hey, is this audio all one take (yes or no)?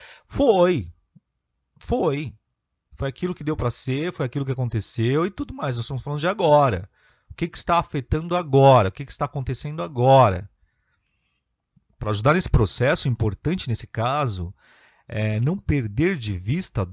yes